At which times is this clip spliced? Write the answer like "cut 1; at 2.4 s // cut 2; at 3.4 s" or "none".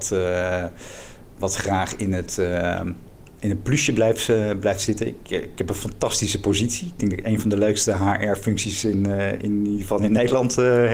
none